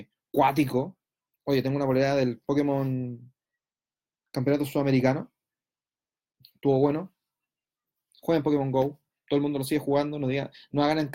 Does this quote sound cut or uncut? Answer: uncut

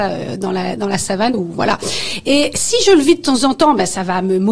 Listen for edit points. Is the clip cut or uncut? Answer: cut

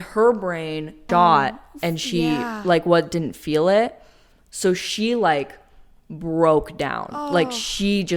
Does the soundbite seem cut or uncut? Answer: cut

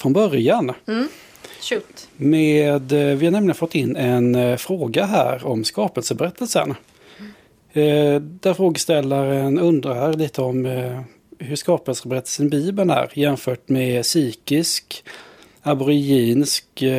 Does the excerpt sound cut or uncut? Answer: uncut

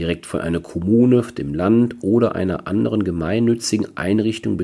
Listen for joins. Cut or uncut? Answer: uncut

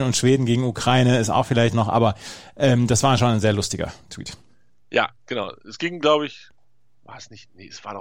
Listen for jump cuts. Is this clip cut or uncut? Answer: uncut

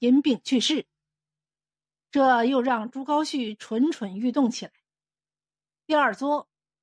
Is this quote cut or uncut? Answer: cut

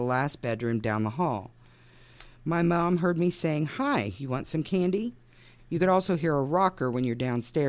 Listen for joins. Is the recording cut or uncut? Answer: cut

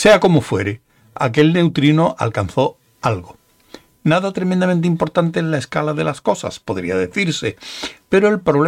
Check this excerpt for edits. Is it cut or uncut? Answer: uncut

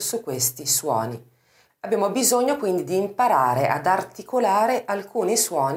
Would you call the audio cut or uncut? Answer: cut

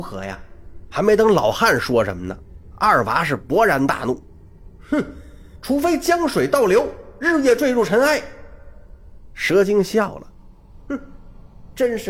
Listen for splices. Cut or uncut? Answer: uncut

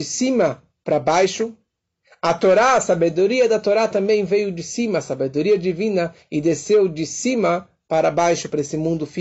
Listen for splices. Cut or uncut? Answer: uncut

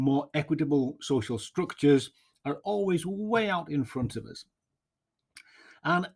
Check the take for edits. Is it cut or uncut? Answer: uncut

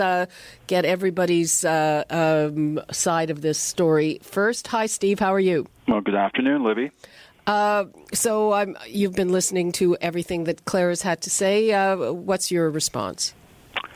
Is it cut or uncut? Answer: uncut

